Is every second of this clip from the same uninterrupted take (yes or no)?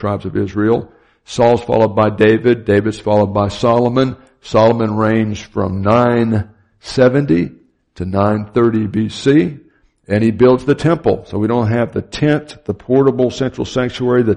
yes